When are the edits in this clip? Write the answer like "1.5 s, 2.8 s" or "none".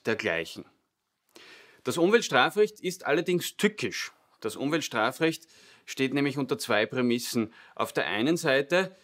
none